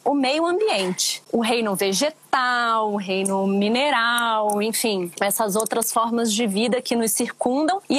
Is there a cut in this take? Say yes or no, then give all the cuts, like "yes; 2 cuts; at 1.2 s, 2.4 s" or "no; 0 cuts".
no; 0 cuts